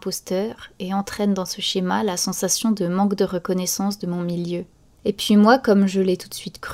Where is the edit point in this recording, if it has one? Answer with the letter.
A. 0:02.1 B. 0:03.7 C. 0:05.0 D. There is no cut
C